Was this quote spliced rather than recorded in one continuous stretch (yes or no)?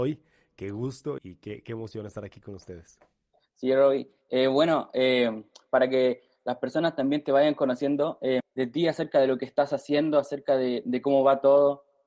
yes